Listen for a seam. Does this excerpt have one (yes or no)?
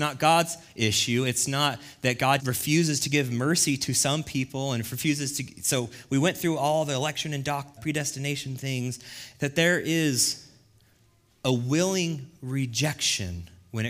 yes